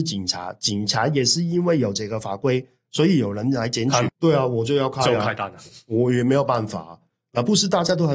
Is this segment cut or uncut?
cut